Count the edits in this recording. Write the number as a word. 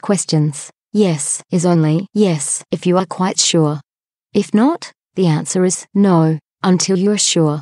zero